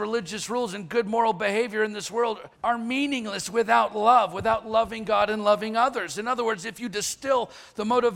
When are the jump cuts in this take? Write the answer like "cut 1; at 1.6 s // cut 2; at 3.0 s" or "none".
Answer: cut 1; at 2.5 s